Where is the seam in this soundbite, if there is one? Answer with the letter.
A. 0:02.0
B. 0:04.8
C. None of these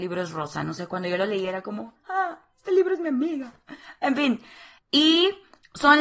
B